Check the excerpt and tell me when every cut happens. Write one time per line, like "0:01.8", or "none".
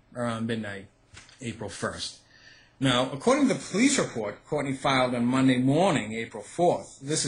0:01.4